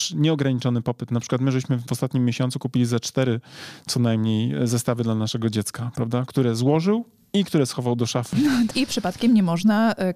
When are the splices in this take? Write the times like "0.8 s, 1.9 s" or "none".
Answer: 8.7 s